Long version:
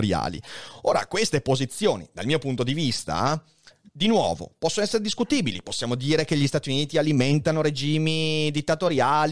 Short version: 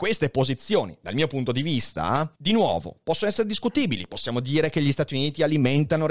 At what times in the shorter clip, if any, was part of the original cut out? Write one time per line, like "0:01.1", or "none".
0:02.4